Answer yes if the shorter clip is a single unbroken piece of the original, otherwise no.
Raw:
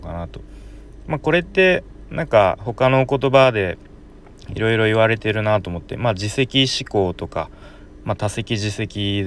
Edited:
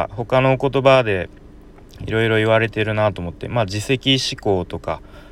yes